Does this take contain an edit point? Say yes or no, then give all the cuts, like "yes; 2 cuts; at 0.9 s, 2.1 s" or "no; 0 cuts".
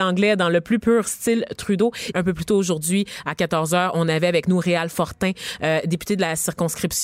yes; 1 cut; at 2.1 s